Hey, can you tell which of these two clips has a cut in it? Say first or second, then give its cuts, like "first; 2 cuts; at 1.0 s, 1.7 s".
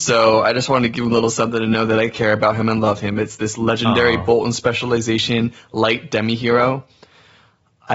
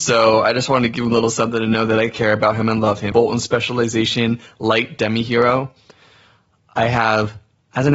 second; 1 cut; at 3.1 s